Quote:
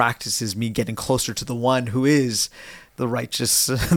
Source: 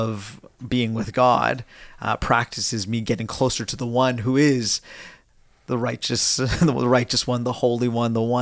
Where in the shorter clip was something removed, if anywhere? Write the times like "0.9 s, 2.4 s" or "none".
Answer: 2.9 s